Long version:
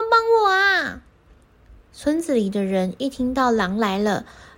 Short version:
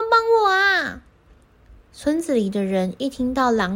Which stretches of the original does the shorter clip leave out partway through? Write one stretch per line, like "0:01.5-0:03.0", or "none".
none